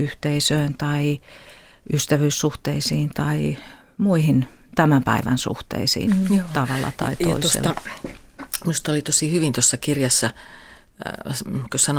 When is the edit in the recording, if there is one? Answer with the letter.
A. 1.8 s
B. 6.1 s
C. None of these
B